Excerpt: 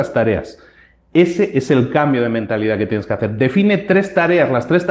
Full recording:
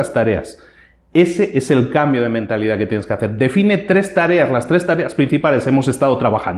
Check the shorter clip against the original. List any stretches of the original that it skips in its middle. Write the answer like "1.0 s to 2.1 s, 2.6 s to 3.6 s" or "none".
none